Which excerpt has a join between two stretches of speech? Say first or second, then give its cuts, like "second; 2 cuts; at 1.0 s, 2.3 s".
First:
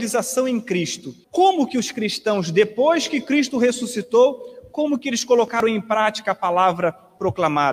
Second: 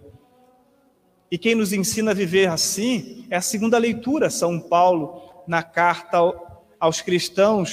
first; 1 cut; at 1.2 s